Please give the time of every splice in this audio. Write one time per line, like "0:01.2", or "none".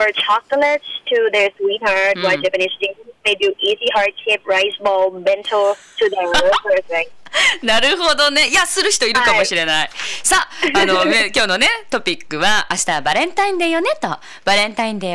none